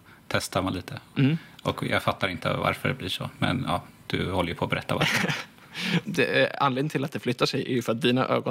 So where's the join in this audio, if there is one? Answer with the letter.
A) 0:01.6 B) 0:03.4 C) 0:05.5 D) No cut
D